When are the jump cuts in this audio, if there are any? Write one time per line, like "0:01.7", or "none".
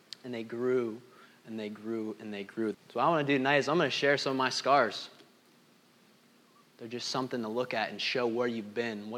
0:02.7
0:06.7